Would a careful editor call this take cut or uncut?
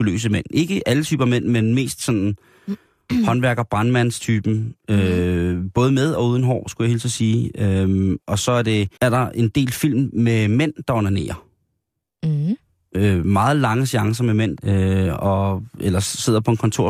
cut